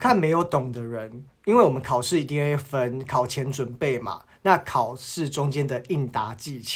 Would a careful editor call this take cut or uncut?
cut